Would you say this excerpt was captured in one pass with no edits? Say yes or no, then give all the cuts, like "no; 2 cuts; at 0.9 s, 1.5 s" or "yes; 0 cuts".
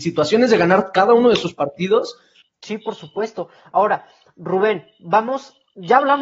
no; 1 cut; at 2.4 s